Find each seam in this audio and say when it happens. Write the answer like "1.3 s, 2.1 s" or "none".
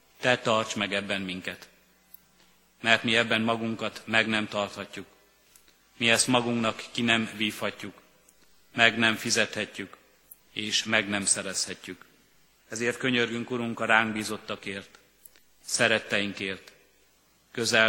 12.6 s